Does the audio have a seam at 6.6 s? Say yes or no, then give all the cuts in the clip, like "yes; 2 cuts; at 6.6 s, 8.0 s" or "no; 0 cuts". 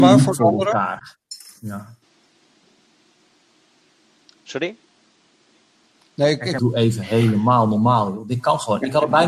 yes; 1 cut; at 6.6 s